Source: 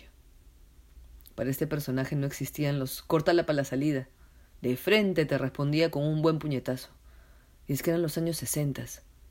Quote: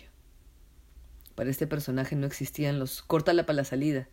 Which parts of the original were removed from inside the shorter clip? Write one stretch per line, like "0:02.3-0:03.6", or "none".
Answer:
none

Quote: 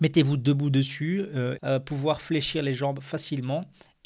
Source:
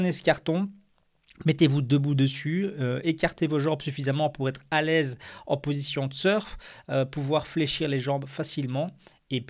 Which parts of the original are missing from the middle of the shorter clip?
0:03.0-0:06.8

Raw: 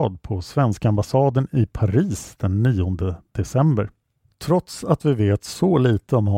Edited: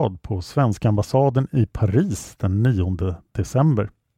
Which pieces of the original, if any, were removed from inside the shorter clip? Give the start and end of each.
none

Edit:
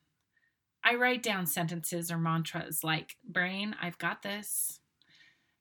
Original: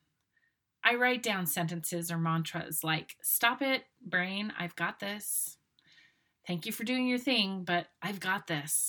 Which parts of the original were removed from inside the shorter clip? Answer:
0:03.2-0:03.9

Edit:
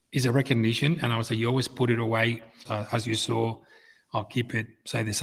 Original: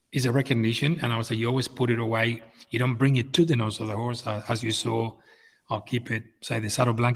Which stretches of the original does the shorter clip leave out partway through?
0:02.7-0:04.2

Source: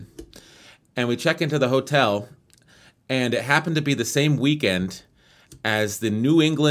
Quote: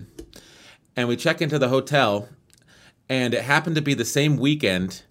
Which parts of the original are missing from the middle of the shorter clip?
none

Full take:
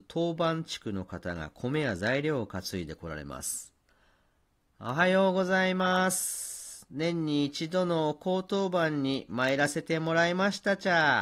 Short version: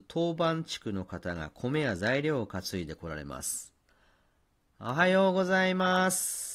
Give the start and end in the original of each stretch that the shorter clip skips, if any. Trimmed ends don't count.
none

